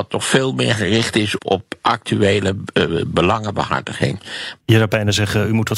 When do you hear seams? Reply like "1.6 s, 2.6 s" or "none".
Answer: 1.4 s, 4.6 s